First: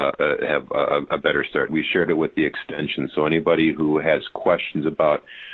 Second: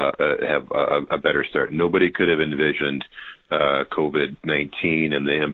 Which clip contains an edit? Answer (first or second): first